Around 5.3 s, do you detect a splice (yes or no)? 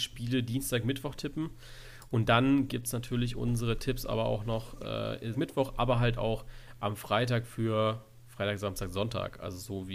yes